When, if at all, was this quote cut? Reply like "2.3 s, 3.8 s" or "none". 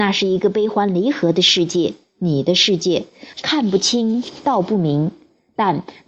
3.3 s